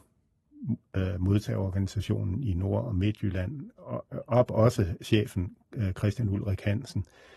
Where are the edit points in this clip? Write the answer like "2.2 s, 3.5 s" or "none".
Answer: none